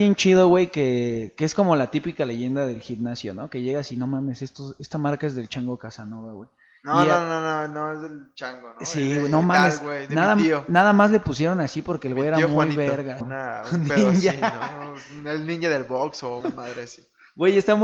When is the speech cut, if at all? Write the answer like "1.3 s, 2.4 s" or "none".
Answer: 13.2 s, 16.4 s